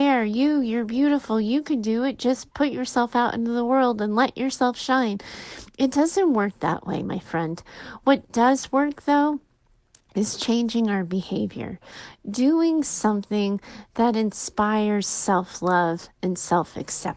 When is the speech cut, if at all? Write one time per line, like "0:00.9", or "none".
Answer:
none